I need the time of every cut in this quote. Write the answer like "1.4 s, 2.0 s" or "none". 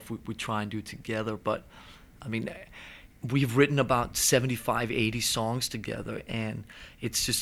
none